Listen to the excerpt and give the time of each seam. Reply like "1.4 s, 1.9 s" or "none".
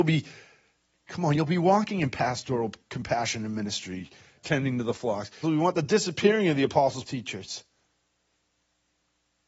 5.4 s, 7.1 s